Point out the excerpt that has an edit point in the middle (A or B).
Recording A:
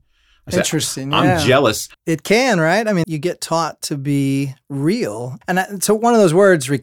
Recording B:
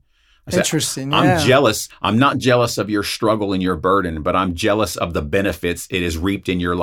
A